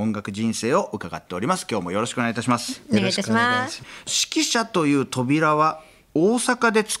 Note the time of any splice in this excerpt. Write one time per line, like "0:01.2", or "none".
none